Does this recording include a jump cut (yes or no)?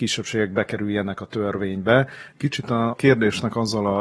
yes